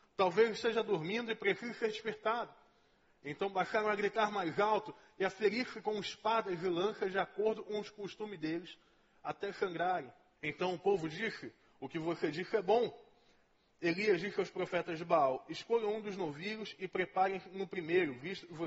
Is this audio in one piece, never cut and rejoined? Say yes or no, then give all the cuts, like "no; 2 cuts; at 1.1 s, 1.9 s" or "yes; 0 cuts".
no; 1 cut; at 10.4 s